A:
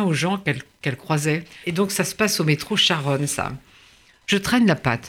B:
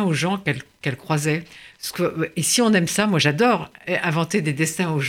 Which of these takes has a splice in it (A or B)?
A